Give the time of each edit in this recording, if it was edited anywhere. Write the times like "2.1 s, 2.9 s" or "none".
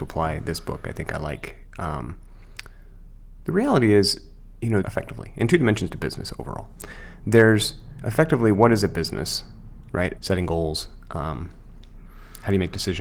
4.8 s, 10.2 s